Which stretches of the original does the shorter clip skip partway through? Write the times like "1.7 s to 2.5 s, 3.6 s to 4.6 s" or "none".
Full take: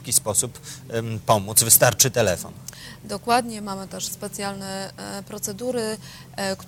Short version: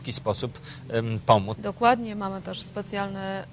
1.5 s to 3.0 s